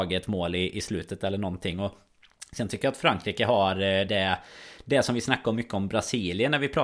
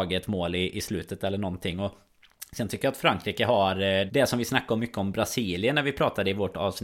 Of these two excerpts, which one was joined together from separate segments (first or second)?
second